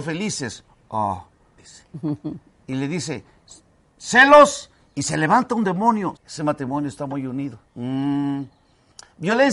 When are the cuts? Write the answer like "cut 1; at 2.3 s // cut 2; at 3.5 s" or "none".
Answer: cut 1; at 1.6 s // cut 2; at 6.2 s // cut 3; at 7.7 s